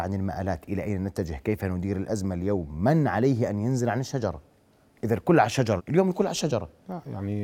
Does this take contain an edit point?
yes; 1 cut; at 5.8 s

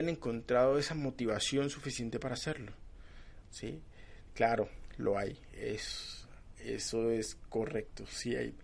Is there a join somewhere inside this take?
yes; 1 cut; at 4.3 s

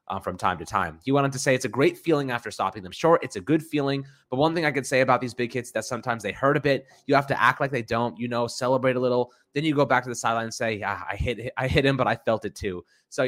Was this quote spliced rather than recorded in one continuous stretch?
no; 0 cuts

